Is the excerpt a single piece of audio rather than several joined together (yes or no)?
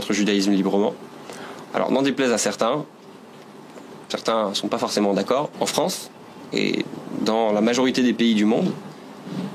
no